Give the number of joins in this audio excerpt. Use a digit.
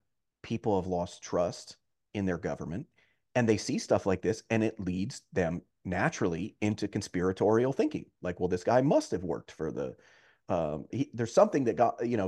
1